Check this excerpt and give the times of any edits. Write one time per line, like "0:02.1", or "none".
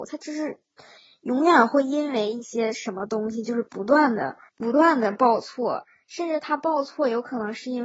0:04.5